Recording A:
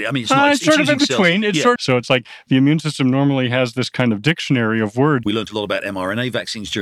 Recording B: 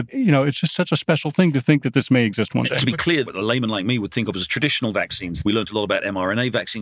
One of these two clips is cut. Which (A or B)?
A